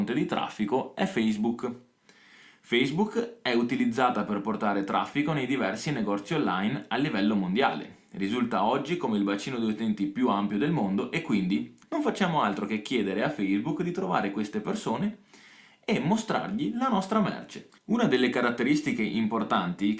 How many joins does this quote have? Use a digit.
2